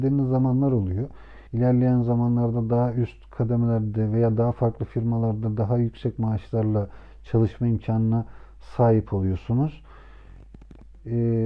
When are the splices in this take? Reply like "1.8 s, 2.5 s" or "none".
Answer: 1.5 s